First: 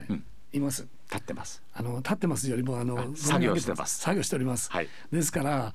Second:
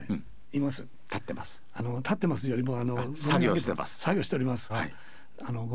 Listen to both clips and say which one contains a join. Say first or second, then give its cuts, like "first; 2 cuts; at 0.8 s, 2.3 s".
second; 1 cut; at 4.7 s